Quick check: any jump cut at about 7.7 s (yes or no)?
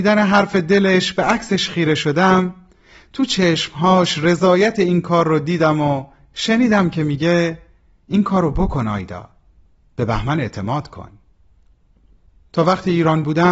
no